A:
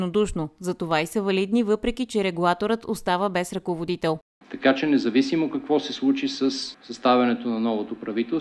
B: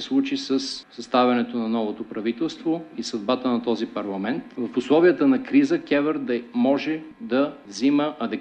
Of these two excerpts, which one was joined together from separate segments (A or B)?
A